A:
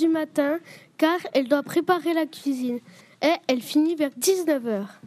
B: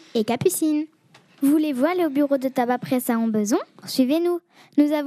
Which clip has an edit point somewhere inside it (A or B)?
B